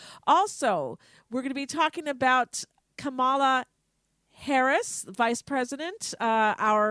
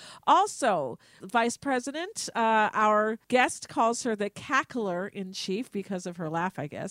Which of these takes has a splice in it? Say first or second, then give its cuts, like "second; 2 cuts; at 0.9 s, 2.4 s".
second; 2 cuts; at 1.2 s, 3.2 s